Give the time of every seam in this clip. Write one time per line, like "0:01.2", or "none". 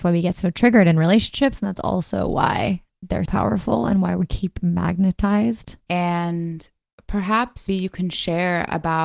0:03.3
0:05.9
0:07.7